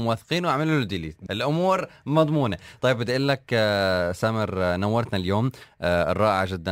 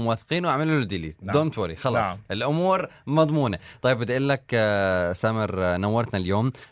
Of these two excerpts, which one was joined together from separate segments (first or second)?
first